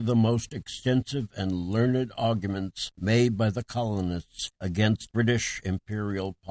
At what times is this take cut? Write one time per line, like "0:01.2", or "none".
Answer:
none

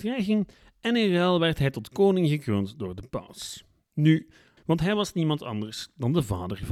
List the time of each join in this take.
0:04.6

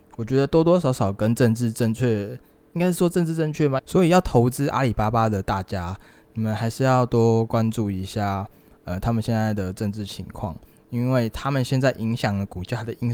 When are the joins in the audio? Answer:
0:03.8

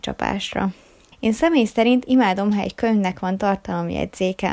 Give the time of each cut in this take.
0:01.1

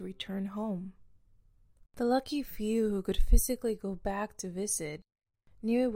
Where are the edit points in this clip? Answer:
0:01.9

